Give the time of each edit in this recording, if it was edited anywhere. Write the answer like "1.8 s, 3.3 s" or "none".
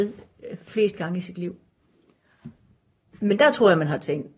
3.2 s

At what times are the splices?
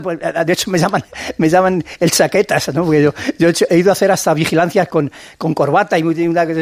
none

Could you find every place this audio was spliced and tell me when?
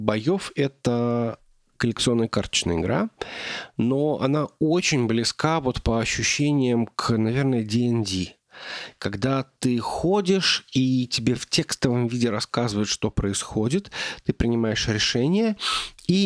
none

